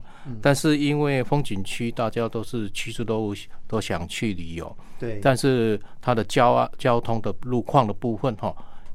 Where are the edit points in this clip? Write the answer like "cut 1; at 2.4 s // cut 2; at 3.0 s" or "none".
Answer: none